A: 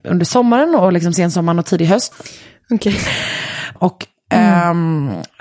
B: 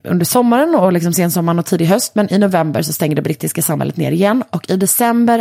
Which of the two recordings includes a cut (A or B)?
A